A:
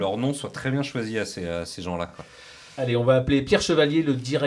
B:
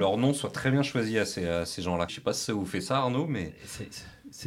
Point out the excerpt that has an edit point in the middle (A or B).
B